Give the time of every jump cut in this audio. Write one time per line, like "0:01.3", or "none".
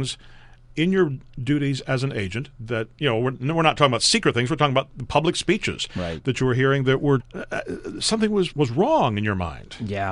0:07.2
0:08.5